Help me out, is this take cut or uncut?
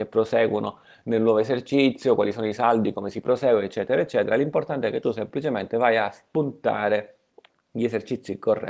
uncut